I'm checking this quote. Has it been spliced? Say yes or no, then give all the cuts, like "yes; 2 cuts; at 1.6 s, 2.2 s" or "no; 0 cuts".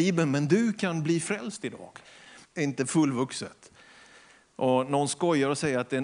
yes; 1 cut; at 2.4 s